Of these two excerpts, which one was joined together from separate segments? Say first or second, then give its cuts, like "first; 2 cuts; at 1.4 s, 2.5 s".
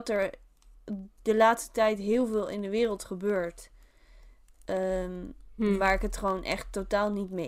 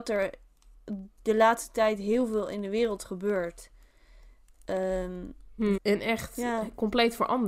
second; 1 cut; at 5.8 s